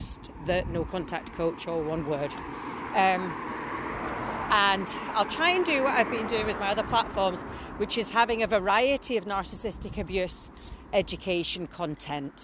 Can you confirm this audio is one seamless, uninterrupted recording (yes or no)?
yes